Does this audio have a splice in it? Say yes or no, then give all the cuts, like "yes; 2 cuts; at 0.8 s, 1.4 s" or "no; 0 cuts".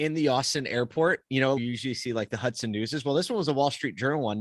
yes; 1 cut; at 1.6 s